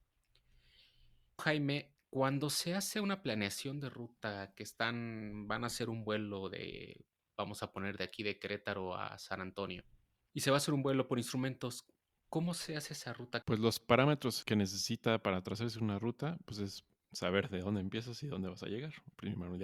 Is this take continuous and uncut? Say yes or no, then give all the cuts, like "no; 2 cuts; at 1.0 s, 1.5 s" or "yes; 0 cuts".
no; 2 cuts; at 1.4 s, 13.4 s